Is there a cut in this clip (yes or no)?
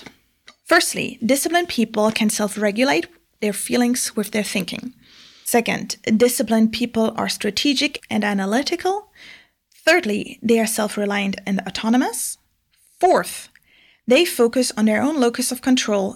no